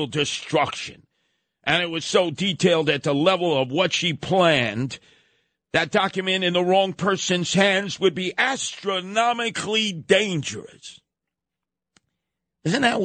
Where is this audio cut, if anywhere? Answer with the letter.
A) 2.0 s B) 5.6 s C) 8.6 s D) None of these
A